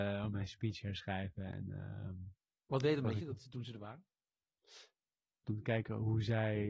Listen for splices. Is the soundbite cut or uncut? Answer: cut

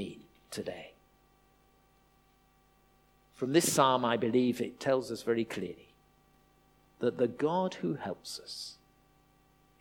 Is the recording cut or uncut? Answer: uncut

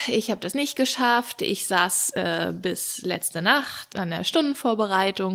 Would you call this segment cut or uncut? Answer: cut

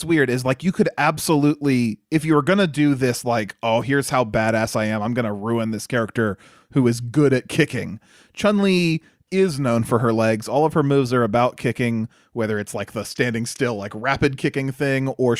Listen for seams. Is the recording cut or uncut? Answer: uncut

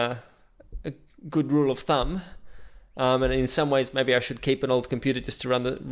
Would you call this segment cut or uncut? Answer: uncut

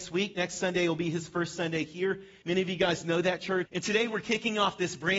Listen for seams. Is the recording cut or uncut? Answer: cut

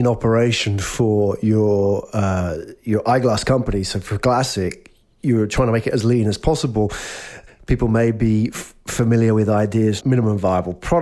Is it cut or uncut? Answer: cut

